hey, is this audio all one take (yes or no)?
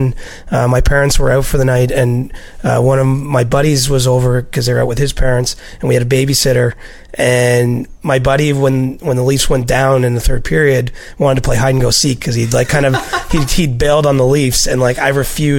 yes